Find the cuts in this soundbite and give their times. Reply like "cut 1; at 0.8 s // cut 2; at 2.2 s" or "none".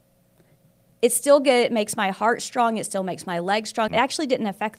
cut 1; at 3.9 s